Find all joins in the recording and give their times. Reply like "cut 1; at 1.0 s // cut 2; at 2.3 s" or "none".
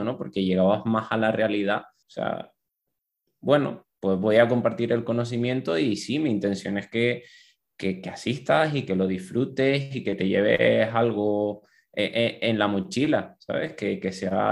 cut 1; at 2.0 s